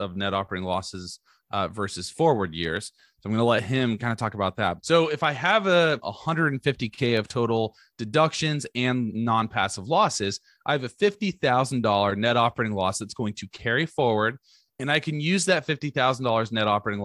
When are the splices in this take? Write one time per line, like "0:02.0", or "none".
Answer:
0:04.8
0:06.0

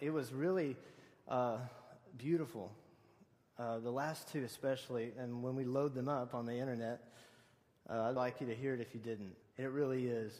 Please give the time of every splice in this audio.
0:08.2
0:09.4

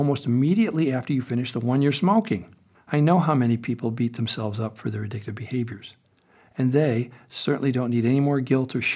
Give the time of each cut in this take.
0:02.7

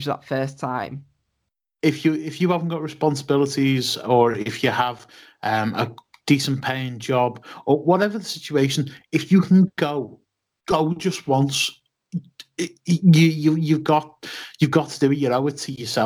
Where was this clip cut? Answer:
none

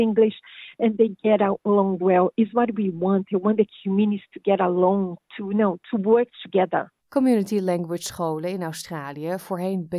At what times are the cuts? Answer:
0:02.0
0:07.0

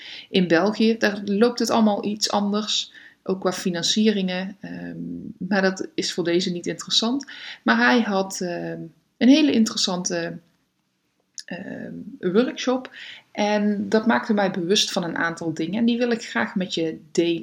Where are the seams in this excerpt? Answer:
none

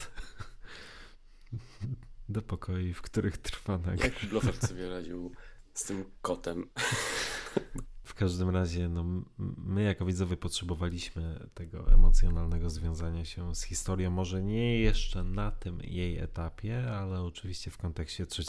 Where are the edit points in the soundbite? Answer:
none

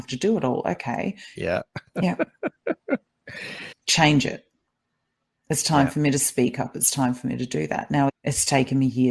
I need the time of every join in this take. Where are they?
0:01.4
0:03.7
0:08.1

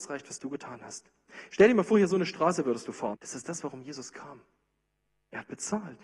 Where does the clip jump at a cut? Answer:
0:03.1

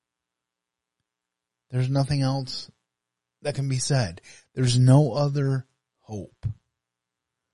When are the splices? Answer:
0:01.5

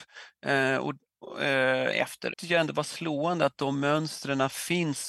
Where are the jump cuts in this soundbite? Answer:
0:02.3

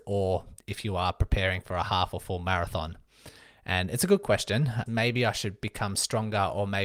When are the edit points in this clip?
0:04.9

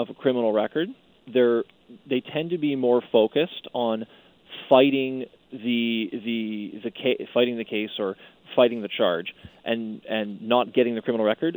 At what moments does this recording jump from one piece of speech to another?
none

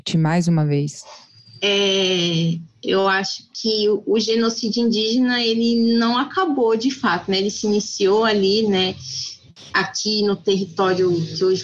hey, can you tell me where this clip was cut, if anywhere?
none

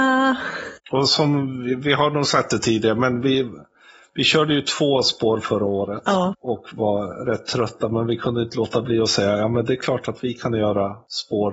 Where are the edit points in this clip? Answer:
none

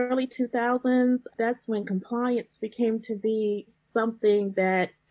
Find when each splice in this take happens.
0:01.3
0:03.7

